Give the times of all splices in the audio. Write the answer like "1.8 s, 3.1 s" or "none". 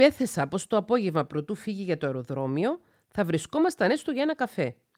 none